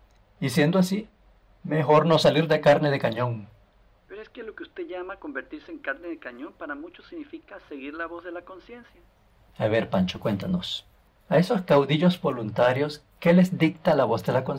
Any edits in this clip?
no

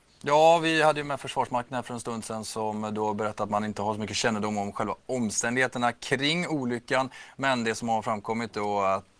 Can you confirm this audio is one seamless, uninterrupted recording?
yes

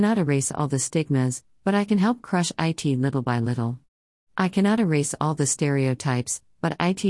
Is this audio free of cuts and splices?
yes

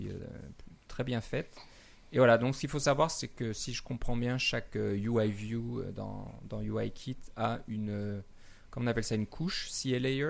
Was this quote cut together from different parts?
no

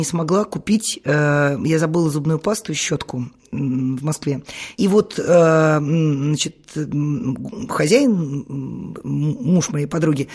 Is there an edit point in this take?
yes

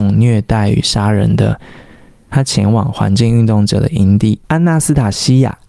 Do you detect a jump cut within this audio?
yes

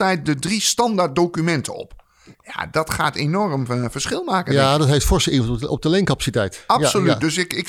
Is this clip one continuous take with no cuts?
no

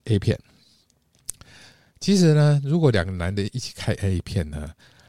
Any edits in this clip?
no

